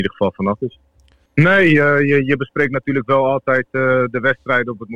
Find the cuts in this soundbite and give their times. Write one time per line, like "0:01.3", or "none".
0:01.3